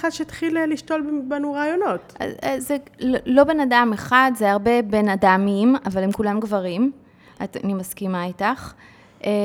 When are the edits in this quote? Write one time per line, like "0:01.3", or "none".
none